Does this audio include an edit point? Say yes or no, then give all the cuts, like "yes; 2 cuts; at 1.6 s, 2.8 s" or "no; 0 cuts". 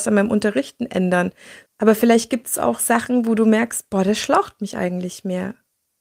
yes; 1 cut; at 1.7 s